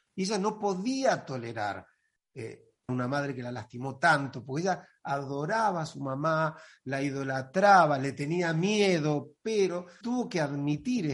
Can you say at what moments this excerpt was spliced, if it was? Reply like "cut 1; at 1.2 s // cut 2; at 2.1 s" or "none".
cut 1; at 2.9 s // cut 2; at 10.0 s